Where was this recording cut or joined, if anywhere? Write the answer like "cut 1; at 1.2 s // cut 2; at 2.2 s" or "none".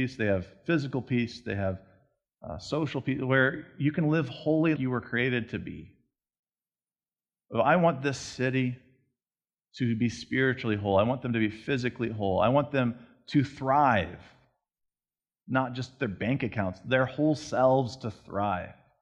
cut 1; at 4.8 s

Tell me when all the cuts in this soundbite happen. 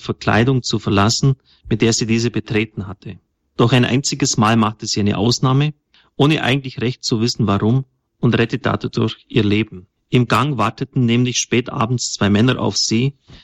none

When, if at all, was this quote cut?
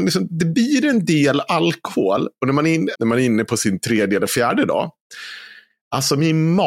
cut 1; at 2.9 s

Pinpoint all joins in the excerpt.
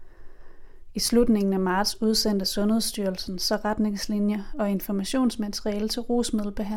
none

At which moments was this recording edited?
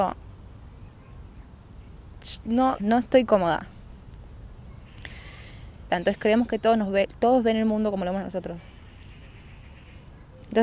cut 1; at 2.8 s // cut 2; at 5.9 s

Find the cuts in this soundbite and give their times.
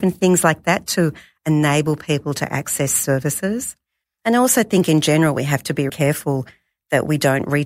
cut 1; at 4.0 s // cut 2; at 5.9 s

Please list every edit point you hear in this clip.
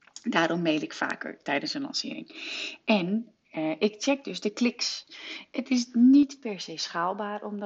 none

